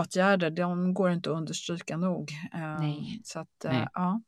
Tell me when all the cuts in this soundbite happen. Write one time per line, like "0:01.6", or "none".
none